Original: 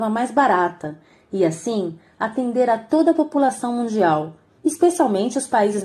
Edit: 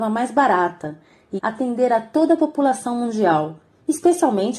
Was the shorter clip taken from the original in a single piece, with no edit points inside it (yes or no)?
no